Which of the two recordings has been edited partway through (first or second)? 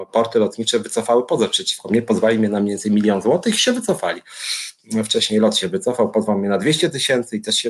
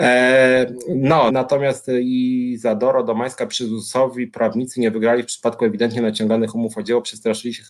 second